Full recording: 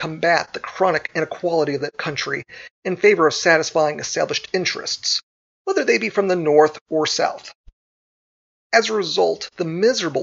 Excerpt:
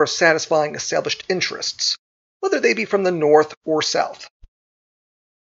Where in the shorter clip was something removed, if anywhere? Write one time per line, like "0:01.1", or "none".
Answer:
none